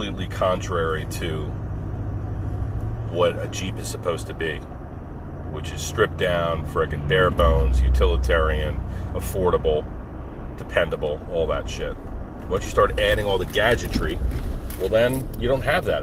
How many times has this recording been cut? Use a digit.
0